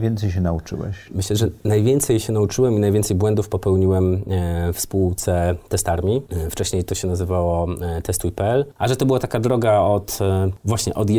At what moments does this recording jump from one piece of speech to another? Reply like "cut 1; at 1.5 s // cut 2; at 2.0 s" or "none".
cut 1; at 8.8 s